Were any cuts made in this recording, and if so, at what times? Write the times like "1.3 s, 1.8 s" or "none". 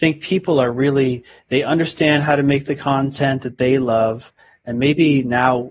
none